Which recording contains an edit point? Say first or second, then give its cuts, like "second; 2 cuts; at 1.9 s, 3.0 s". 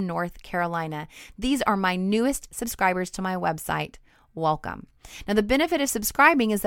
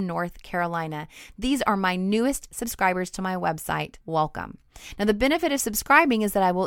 second; 1 cut; at 4.0 s